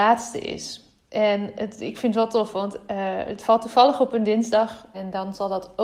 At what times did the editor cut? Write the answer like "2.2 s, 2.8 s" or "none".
4.9 s